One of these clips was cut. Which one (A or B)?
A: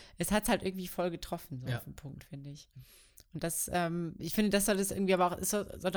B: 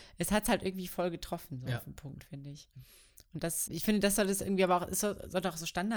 B